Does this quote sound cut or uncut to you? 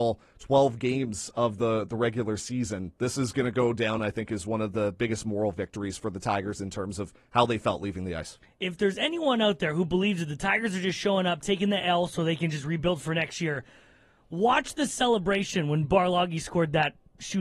uncut